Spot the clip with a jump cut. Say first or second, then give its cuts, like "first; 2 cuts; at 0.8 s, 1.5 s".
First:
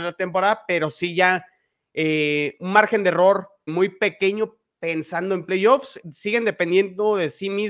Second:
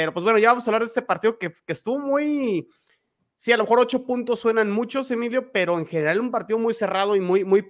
first; 2 cuts; at 3.7 s, 6.0 s